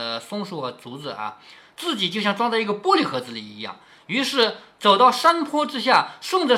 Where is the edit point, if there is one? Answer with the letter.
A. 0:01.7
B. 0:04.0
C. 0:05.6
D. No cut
D